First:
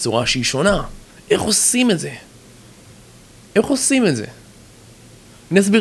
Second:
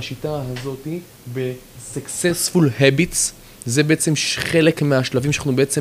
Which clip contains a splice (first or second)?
second